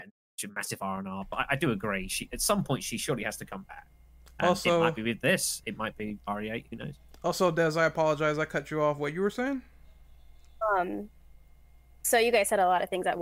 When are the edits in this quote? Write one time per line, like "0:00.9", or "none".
none